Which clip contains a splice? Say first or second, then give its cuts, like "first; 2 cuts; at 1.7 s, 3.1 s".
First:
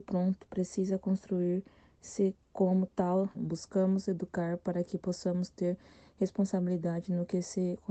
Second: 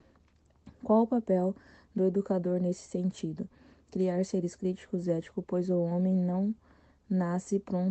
first; 1 cut; at 3.3 s